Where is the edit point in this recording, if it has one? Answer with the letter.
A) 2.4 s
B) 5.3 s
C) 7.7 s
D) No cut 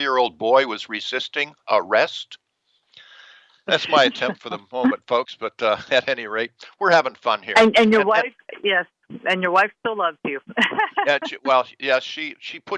D